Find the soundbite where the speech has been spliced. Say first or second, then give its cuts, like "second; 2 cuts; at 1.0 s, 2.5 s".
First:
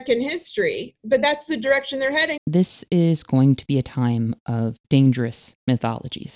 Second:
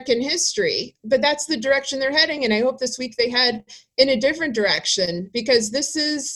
first; 2 cuts; at 2.4 s, 4.8 s